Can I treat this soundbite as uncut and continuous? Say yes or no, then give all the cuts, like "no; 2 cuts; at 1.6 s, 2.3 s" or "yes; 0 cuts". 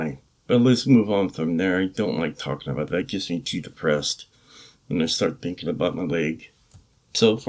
yes; 0 cuts